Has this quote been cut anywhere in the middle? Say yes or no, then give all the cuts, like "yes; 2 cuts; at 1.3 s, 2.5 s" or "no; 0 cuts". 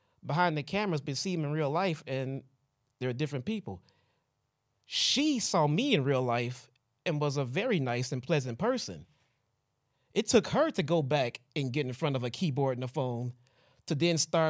no; 0 cuts